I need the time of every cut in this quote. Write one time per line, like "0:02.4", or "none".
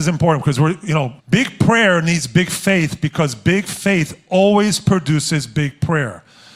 0:01.2